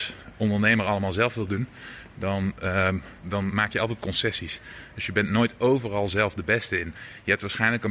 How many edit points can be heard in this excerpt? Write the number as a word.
one